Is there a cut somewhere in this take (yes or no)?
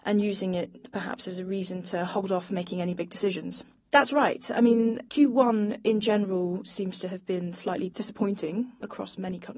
yes